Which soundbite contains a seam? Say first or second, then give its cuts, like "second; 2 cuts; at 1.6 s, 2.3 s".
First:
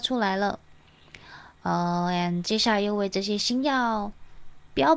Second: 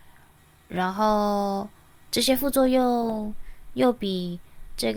first; 1 cut; at 2.4 s